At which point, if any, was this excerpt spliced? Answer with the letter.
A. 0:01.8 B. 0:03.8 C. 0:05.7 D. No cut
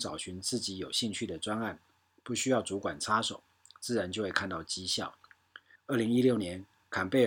C